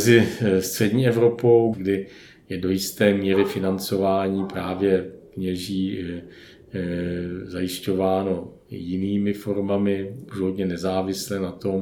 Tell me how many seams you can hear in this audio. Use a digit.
1